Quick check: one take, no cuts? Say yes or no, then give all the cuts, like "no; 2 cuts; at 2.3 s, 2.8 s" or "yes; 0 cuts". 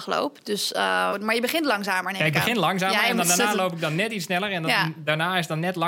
no; 1 cut; at 1.1 s